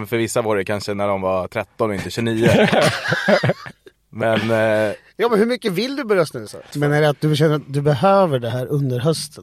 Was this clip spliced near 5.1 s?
no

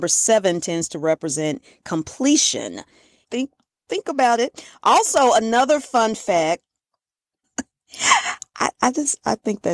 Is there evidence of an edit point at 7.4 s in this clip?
yes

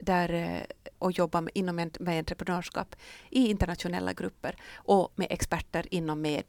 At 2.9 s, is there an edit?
no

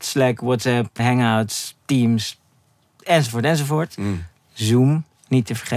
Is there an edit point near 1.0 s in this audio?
yes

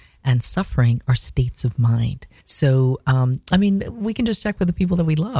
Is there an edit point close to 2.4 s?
yes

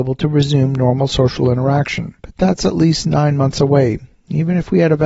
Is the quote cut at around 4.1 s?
no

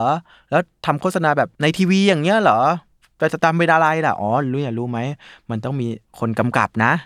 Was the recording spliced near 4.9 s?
no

